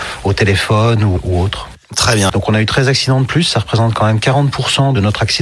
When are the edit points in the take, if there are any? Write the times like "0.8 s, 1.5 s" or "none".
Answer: 2.3 s